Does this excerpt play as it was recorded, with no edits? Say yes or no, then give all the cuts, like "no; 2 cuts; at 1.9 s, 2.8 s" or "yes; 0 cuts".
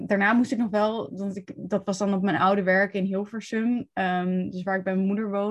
yes; 0 cuts